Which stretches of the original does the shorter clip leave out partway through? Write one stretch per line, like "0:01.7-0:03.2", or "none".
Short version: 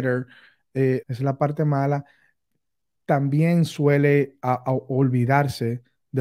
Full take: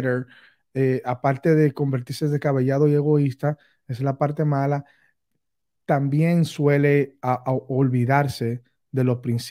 0:01.0-0:03.8